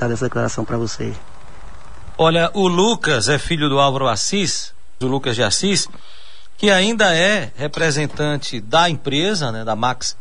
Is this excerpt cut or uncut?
cut